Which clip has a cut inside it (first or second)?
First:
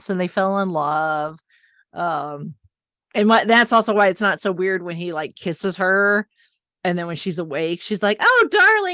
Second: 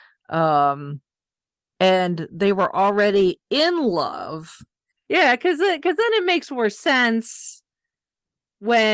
second